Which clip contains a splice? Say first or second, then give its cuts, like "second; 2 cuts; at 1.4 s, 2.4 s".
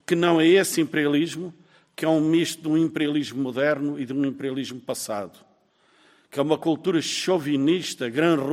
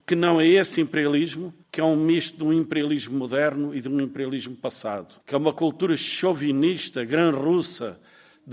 second; 2 cuts; at 1.6 s, 5.2 s